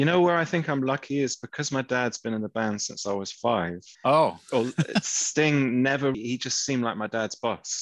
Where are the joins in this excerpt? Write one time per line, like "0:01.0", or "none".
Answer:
0:04.0
0:06.1